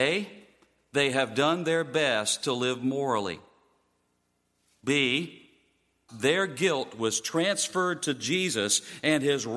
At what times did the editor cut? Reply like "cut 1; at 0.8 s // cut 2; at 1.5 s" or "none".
cut 1; at 6.1 s